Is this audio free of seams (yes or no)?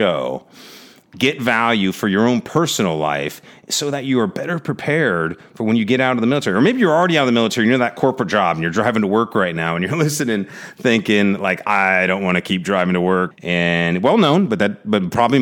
no